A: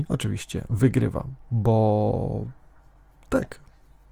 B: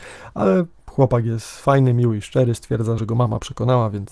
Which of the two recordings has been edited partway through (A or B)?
B